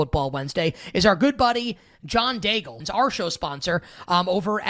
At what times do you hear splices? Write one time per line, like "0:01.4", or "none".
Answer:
0:02.8